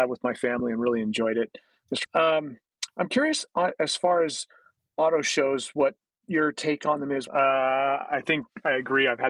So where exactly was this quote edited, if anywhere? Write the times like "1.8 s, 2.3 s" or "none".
2.0 s, 7.3 s